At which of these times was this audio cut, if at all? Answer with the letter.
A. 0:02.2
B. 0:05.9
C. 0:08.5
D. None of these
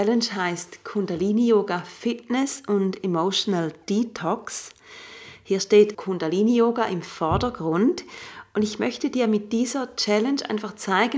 B